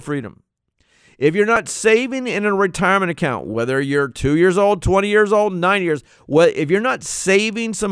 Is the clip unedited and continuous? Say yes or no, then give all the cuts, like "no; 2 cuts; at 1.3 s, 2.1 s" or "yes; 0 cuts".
yes; 0 cuts